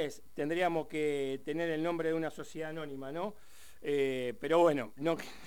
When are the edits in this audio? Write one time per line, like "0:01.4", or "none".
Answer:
none